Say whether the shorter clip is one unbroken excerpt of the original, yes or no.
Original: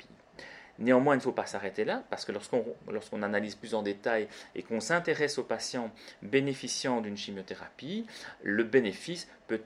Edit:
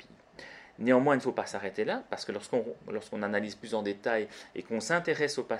yes